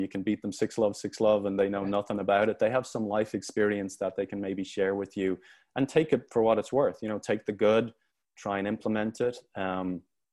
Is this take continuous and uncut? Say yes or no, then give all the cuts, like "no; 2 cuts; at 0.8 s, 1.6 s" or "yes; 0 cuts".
yes; 0 cuts